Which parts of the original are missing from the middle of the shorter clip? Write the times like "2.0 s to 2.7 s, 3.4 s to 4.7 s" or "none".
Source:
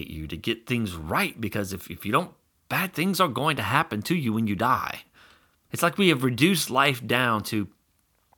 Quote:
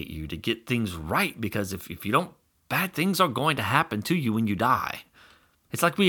none